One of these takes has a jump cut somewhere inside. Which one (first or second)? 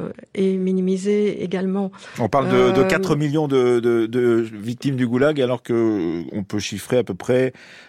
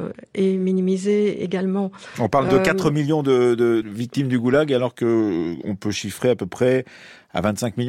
second